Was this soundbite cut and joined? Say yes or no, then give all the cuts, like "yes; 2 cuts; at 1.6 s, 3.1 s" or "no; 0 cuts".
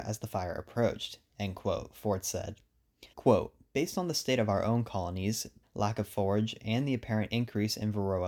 yes; 2 cuts; at 3.1 s, 5.6 s